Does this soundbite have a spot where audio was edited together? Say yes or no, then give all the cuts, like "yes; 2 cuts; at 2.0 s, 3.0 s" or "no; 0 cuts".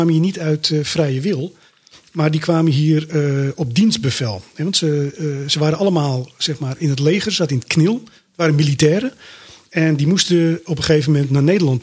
no; 0 cuts